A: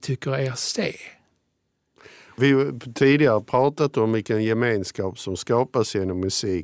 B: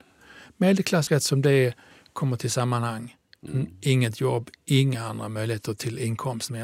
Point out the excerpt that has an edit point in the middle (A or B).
B